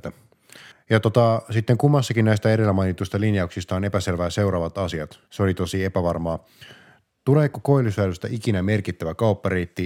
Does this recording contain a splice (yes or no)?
yes